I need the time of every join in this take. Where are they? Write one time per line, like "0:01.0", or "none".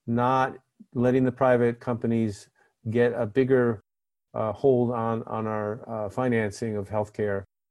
none